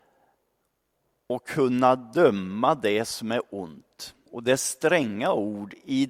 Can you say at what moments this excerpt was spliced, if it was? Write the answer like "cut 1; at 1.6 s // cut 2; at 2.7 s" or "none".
cut 1; at 4.3 s